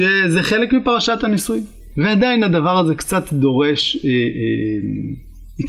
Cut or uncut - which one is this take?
cut